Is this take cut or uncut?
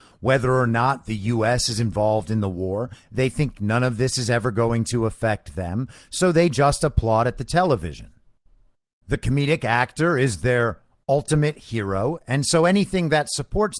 uncut